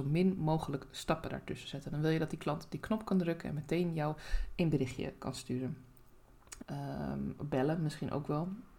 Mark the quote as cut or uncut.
cut